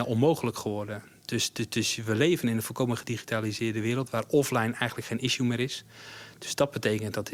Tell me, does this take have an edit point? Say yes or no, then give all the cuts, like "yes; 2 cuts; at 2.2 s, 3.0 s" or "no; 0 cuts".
no; 0 cuts